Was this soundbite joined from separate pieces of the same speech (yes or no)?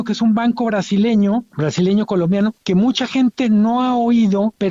no